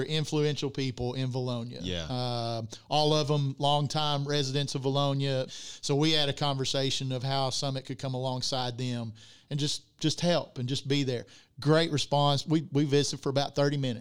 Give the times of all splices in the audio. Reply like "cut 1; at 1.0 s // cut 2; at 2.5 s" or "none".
cut 1; at 5.5 s

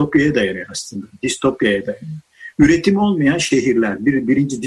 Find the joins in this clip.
none

